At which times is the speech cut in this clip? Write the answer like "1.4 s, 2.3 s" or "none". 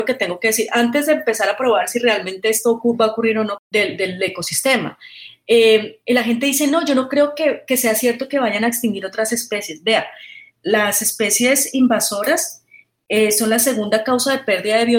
3.6 s